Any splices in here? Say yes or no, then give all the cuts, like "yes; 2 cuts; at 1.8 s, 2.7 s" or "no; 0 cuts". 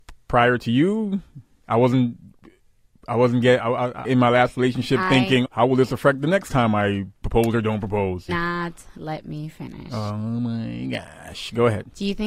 yes; 3 cuts; at 4.0 s, 5.4 s, 8.3 s